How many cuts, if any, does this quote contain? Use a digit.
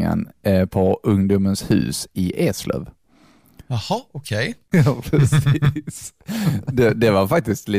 1